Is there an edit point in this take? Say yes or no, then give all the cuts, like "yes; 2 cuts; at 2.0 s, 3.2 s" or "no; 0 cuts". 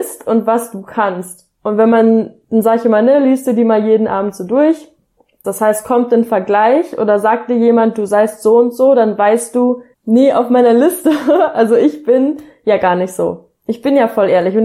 yes; 2 cuts; at 5.4 s, 9.9 s